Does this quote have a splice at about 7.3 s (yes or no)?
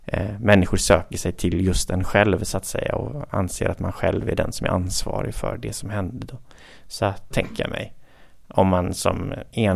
yes